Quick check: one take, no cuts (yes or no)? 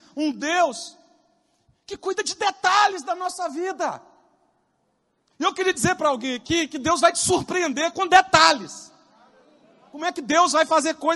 yes